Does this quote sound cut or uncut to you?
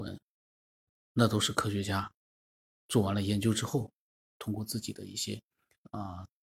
cut